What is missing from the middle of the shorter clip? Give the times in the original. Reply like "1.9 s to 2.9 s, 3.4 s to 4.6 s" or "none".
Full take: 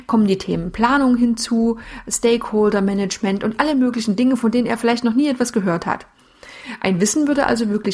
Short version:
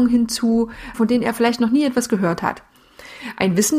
2.0 s to 4.4 s